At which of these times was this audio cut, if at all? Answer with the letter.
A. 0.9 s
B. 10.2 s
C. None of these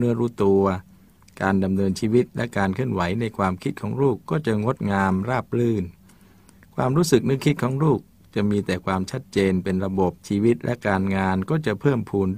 B